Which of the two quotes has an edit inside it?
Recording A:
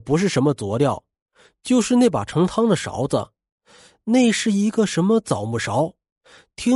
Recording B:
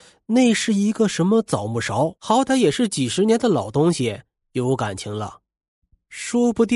B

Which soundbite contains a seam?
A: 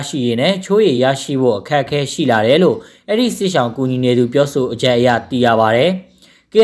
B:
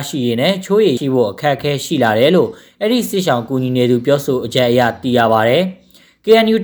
B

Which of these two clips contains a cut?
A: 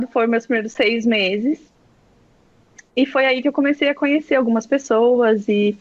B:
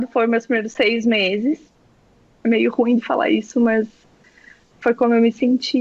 B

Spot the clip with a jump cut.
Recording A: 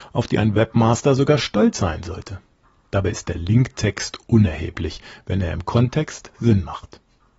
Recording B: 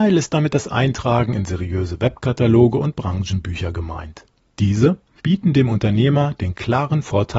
B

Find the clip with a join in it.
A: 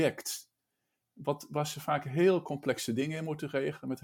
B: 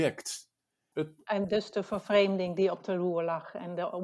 B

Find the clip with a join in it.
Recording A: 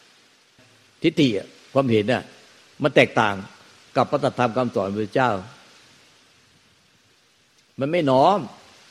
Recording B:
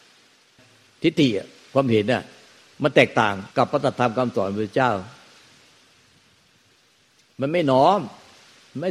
B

